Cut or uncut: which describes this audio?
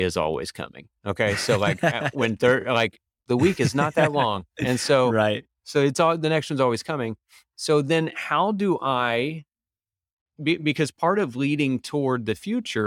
uncut